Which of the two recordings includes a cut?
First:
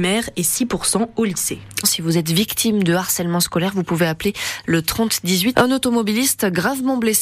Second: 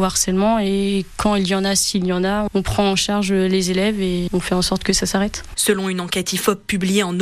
first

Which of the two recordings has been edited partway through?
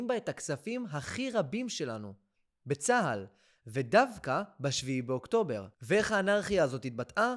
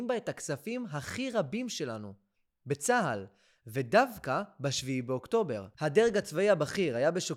second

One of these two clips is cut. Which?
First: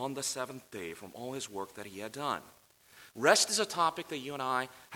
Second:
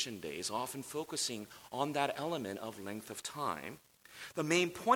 first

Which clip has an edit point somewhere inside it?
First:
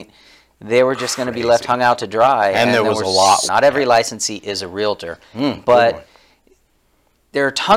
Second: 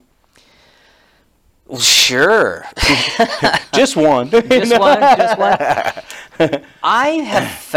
first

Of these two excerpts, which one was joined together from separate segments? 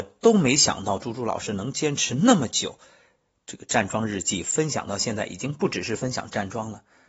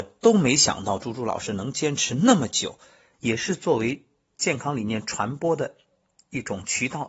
second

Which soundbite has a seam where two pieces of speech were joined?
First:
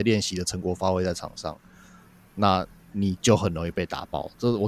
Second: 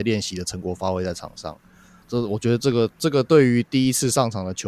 second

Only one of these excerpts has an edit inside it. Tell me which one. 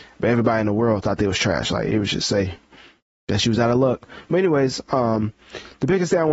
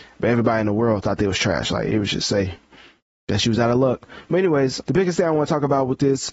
second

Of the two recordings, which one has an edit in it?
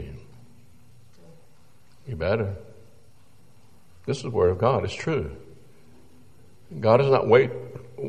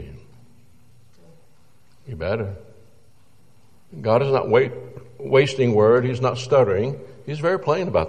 second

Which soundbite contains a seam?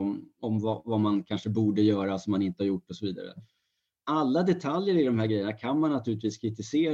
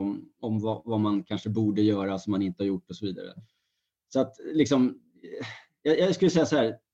first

